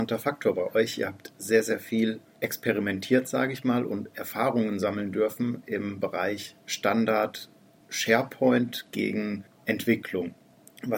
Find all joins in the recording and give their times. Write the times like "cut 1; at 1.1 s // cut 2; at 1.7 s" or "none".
none

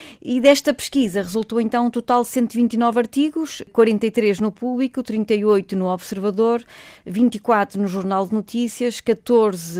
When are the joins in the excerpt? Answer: none

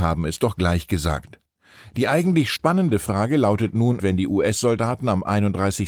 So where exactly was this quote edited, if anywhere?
cut 1; at 4.0 s

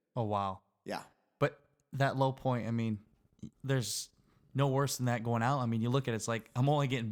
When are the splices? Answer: cut 1; at 3.5 s

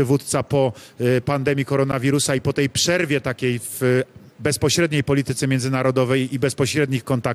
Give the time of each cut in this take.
none

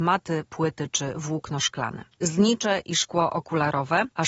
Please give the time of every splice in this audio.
cut 1; at 2.1 s

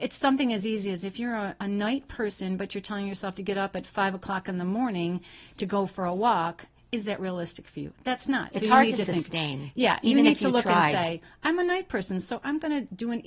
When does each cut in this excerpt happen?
none

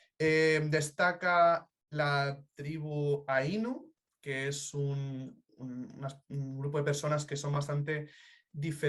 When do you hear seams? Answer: none

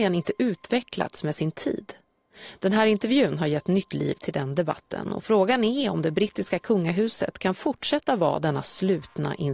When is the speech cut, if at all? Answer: none

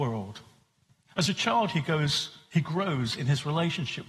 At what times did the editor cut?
cut 1; at 1.1 s

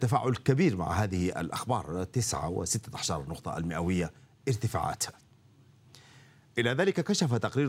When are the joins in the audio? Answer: none

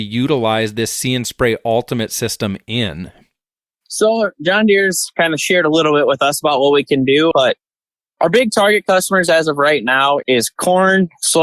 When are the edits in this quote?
cut 1; at 7.3 s // cut 2; at 10.2 s

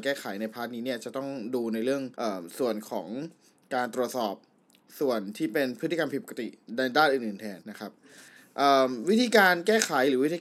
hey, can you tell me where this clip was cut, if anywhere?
cut 1; at 2.1 s // cut 2; at 7.6 s

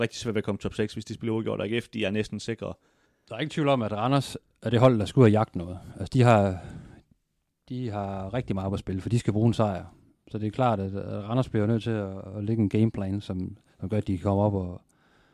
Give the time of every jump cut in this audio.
cut 1; at 3.1 s

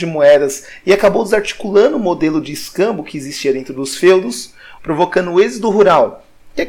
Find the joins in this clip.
cut 1; at 4.8 s

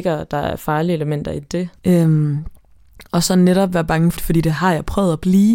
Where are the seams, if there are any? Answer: cut 1; at 1.8 s // cut 2; at 4.2 s

